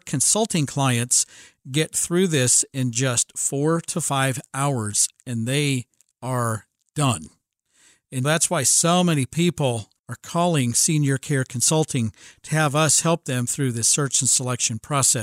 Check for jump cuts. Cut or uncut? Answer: cut